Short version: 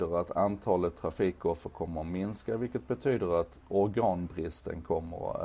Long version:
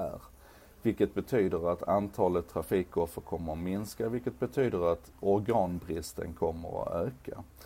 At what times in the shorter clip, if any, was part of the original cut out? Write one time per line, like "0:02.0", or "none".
none